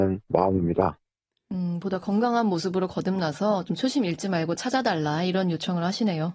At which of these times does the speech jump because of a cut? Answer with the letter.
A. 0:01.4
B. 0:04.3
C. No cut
C